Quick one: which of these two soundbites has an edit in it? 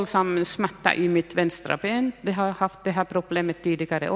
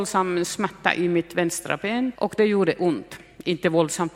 second; 1 cut; at 2.1 s

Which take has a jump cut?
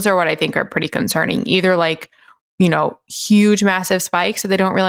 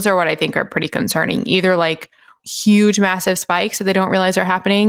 second; 1 cut; at 2.4 s

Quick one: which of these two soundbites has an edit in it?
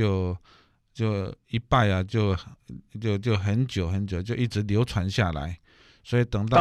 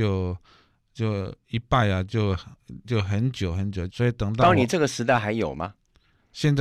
second; 2 cuts; at 2.8 s, 3.9 s

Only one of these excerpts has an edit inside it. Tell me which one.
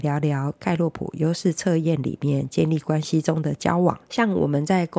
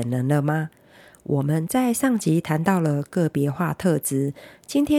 first; 1 cut; at 4.1 s

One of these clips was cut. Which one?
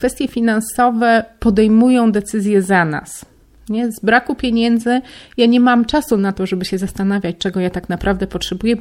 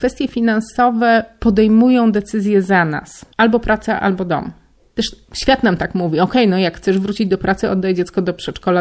second; 1 cut; at 3.3 s

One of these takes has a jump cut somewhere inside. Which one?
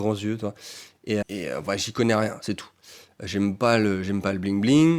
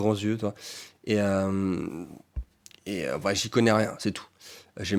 first; 1 cut; at 1.2 s

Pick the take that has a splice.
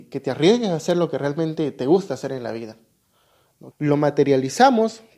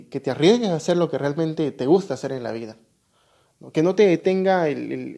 first; 1 cut; at 3.7 s

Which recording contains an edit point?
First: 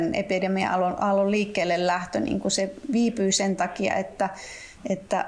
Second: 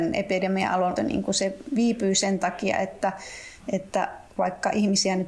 second; 1 cut; at 1.0 s

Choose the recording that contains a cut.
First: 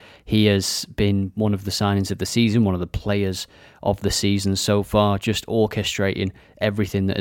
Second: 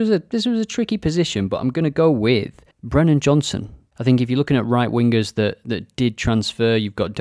second; 1 cut; at 2.7 s

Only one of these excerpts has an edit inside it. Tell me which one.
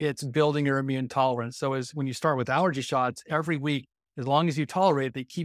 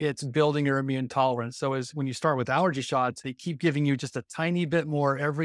second; 1 cut; at 3.2 s

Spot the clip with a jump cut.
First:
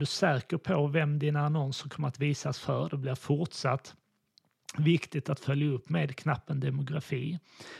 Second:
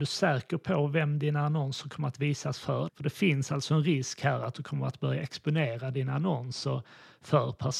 second; 1 cut; at 2.9 s

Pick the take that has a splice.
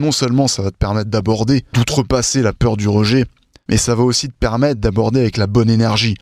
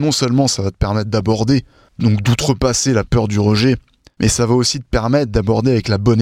first; 1 cut; at 1.7 s

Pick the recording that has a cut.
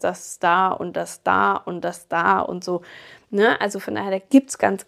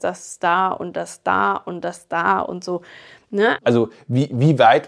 second; 1 cut; at 3.6 s

